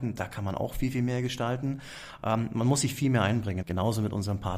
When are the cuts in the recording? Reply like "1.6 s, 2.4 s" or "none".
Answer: 3.6 s